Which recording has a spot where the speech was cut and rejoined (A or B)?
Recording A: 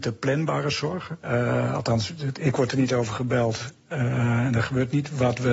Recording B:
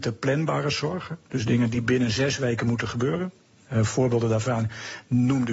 A